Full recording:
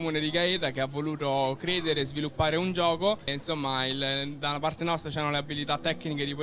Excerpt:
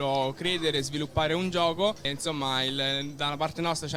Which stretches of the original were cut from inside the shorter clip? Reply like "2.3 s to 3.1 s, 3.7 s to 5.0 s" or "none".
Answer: none

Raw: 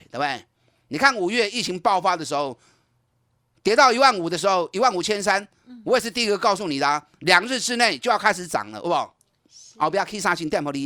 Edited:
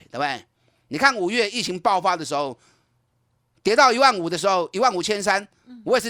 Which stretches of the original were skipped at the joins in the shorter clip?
none

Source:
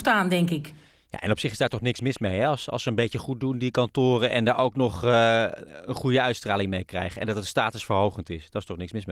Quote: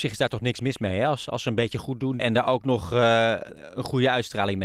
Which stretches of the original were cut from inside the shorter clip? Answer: 3.6 s to 4.3 s

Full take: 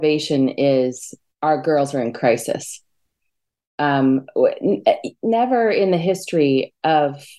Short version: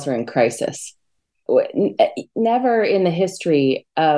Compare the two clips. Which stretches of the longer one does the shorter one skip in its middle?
3.3 s to 4.3 s

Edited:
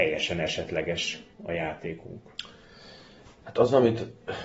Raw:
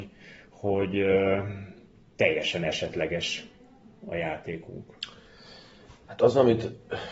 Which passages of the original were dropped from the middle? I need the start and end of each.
3.6 s to 4.0 s

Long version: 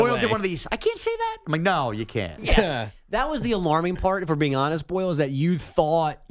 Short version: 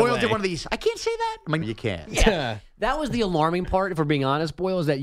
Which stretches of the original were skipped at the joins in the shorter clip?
1.6 s to 1.9 s

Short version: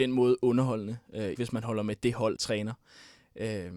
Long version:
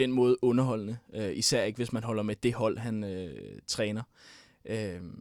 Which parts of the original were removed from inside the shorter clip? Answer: 1.3 s to 1.7 s, 2.8 s to 3.6 s

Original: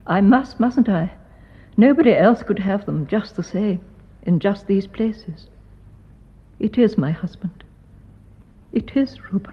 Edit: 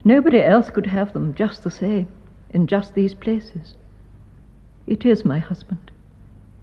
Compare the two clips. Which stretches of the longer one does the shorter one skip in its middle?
none

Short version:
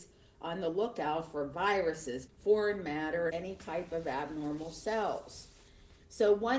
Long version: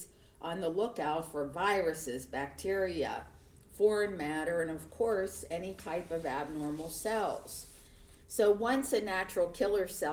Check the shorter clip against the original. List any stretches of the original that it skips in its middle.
2.3 s to 3.6 s, 4.6 s to 5.5 s

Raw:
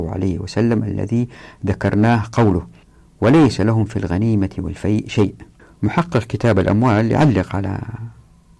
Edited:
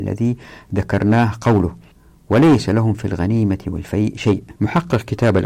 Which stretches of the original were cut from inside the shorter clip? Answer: 5.5 s to 5.8 s

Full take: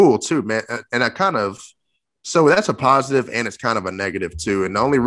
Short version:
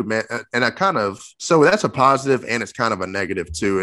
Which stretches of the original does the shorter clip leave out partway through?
1.7 s to 2.2 s

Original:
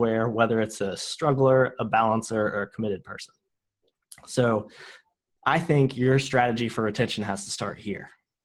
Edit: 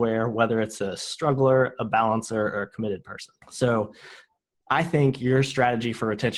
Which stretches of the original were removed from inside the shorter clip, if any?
3.4 s to 4.2 s

